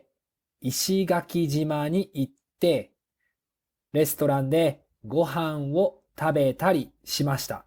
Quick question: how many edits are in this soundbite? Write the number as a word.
one